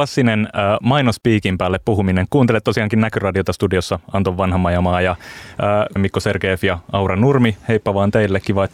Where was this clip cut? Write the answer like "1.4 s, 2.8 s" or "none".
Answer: 6.0 s